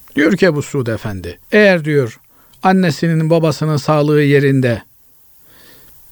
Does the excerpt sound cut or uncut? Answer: cut